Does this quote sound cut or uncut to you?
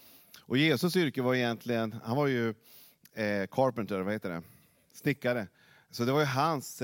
uncut